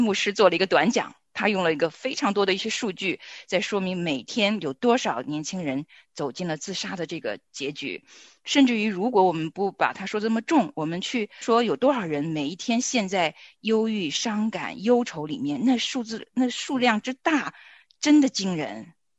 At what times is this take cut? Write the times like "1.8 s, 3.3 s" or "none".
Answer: 11.4 s